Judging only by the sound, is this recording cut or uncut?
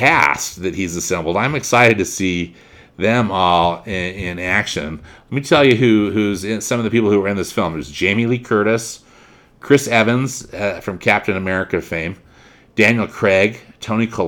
uncut